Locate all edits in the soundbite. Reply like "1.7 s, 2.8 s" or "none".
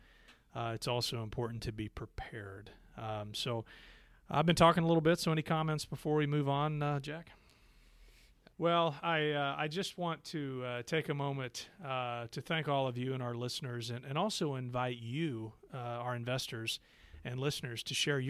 8.5 s